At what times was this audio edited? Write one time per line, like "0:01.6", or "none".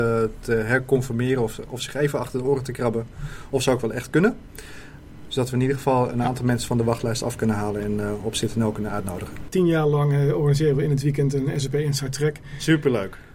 0:09.5